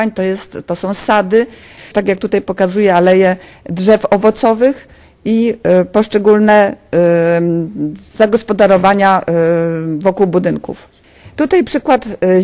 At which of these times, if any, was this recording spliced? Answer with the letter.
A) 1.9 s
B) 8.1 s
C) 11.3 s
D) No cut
A